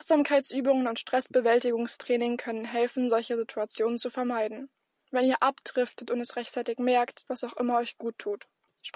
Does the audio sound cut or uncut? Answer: cut